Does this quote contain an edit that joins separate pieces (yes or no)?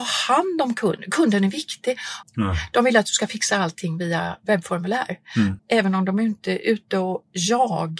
yes